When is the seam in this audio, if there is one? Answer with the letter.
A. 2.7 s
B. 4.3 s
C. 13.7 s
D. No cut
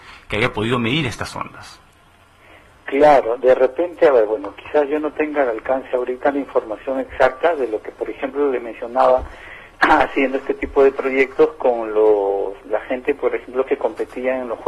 D